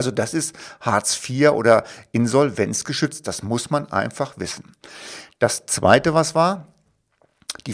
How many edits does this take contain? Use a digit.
0